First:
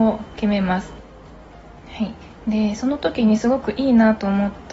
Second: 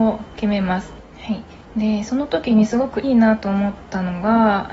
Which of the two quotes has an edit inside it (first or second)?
second